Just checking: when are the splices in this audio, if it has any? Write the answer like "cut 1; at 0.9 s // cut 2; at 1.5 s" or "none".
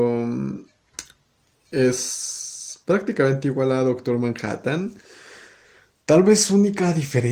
none